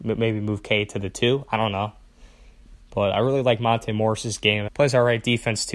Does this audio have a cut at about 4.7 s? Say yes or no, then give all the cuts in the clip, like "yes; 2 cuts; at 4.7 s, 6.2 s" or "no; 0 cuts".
yes; 1 cut; at 4.7 s